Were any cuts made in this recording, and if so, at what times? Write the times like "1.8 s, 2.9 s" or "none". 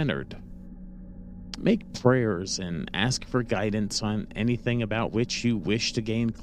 1.6 s